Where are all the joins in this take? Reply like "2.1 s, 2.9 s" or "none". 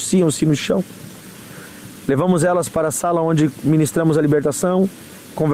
none